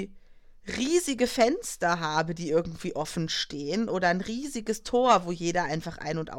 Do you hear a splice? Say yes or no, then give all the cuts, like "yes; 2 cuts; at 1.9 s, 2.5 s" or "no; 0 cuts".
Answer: no; 0 cuts